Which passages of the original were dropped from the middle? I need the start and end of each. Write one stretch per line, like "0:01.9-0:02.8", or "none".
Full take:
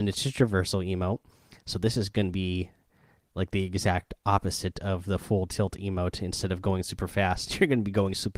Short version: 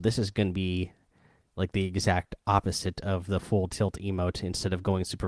none